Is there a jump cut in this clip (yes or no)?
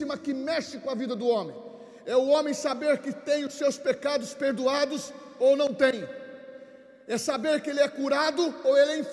no